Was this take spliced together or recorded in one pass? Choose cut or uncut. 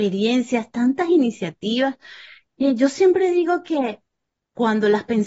uncut